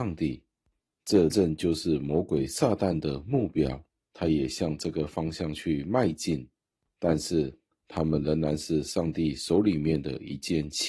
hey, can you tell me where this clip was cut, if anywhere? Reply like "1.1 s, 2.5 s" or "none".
1.3 s